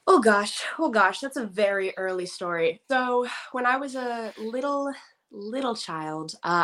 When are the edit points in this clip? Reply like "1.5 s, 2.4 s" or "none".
2.8 s